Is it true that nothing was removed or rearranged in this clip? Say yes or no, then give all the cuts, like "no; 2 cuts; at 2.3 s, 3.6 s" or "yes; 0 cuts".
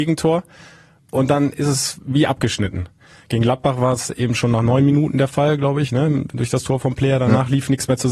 yes; 0 cuts